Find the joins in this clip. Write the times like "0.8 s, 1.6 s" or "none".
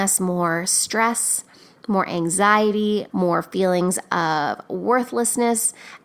3.1 s